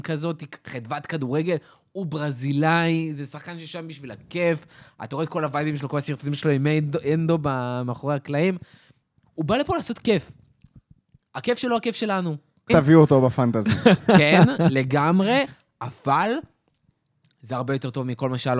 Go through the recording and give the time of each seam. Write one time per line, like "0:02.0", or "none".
0:12.7